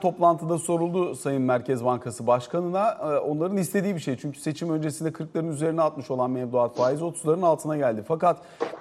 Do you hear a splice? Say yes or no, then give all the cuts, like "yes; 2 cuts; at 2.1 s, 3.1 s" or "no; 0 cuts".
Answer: no; 0 cuts